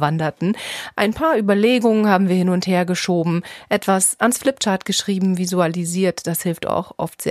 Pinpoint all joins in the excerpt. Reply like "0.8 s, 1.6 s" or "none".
none